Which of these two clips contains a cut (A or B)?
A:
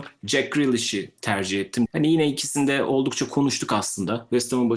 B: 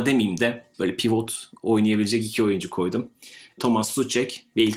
A